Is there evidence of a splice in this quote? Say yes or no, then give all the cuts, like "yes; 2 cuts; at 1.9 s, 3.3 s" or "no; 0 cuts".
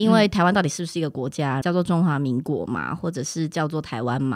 yes; 1 cut; at 1.6 s